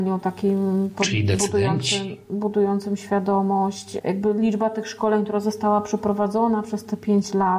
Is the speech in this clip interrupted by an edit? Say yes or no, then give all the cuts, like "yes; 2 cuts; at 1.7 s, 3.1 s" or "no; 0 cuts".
no; 0 cuts